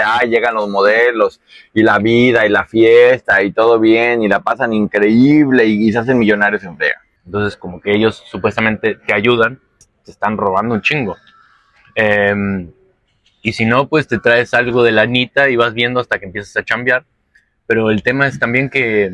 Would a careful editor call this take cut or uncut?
cut